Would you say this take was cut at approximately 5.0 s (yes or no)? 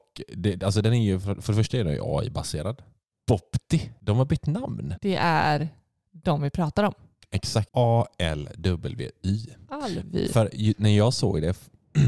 yes